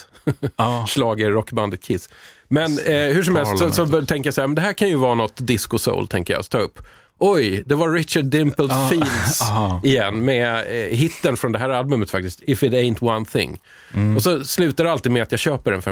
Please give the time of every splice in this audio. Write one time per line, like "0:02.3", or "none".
none